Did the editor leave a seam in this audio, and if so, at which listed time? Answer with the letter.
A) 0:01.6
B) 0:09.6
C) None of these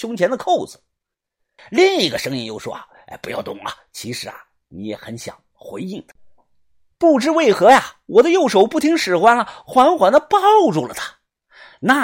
A